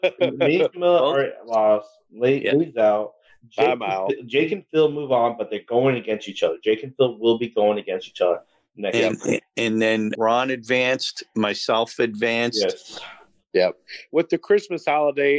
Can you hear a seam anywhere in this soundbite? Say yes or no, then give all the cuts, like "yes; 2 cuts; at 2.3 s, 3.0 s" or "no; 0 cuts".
no; 0 cuts